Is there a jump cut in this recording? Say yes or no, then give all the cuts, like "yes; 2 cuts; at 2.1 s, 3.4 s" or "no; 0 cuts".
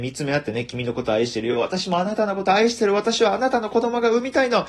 no; 0 cuts